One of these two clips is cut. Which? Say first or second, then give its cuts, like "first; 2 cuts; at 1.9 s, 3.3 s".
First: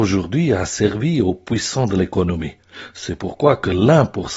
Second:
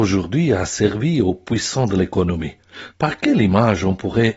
second; 1 cut; at 2.9 s